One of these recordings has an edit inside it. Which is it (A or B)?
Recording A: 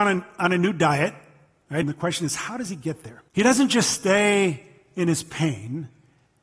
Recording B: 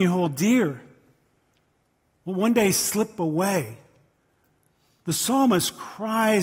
A